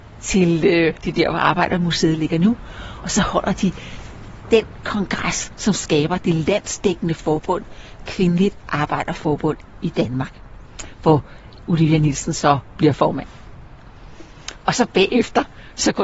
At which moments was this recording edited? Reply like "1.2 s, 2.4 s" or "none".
1.0 s

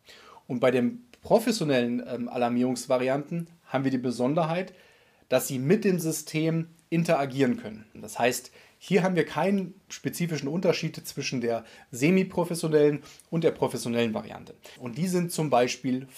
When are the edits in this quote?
8.0 s, 14.8 s

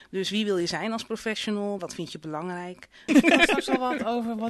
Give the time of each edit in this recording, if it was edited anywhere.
1.8 s, 3.1 s

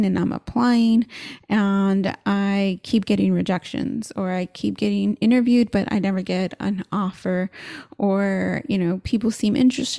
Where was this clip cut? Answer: none

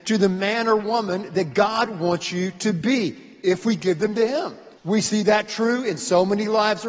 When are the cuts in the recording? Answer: 4.8 s

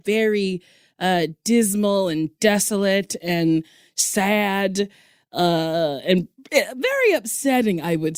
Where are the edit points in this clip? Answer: none

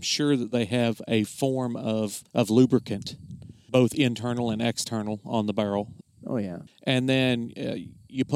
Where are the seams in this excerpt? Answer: 2.3 s, 6.7 s

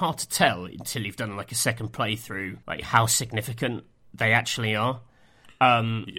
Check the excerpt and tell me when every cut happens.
2.6 s

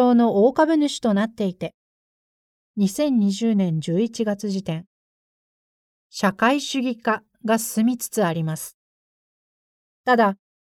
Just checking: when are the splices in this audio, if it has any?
none

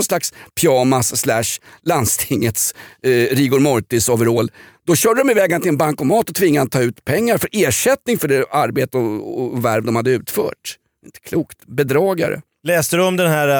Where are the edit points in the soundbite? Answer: none

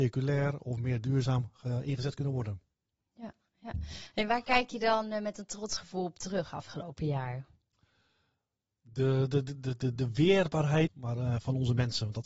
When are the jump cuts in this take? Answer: 10.9 s

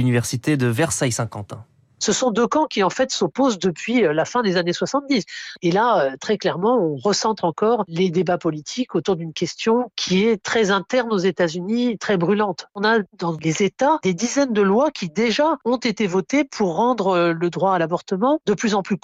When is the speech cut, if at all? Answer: none

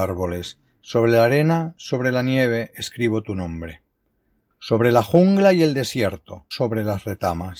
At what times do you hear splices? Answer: 4.5 s, 6.5 s

